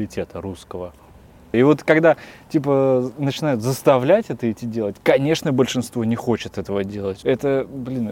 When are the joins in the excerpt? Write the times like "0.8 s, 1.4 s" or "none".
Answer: 1.5 s, 7.2 s